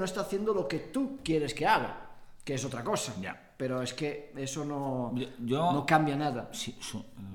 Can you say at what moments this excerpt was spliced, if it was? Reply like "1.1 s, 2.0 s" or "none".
none

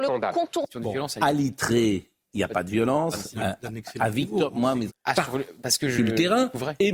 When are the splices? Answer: 3.3 s, 4.9 s

